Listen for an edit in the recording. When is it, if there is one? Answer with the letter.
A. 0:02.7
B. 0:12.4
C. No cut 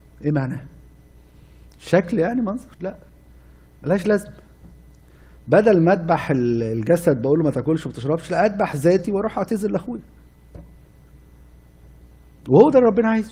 A